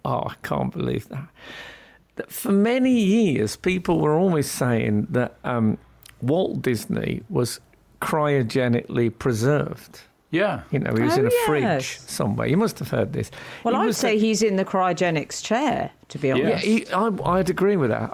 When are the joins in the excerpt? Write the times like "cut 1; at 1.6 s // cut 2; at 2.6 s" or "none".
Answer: none